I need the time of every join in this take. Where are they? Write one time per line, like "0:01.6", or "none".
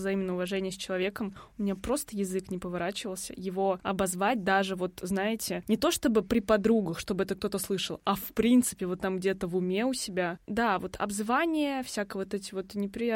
none

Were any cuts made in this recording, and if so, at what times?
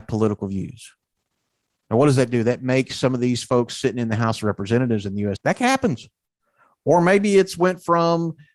0:05.4

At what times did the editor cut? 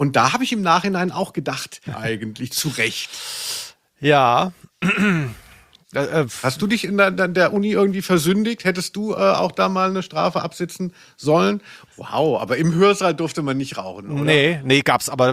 0:01.9
0:11.9

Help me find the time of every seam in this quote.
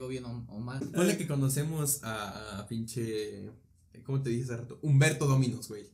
none

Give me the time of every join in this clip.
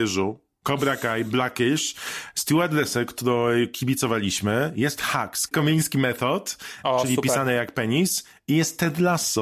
0:05.5
0:06.8

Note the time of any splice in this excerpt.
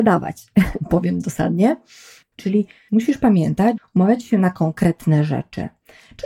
0:02.3
0:03.8

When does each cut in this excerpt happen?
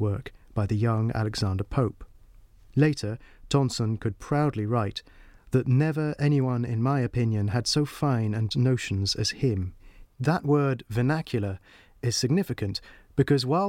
0:08.5
0:10.0

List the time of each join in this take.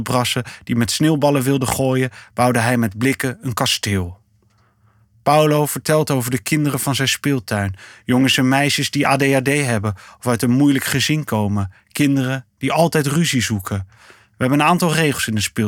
none

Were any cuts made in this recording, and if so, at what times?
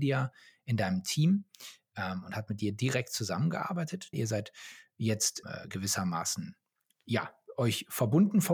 0:04.1
0:05.4

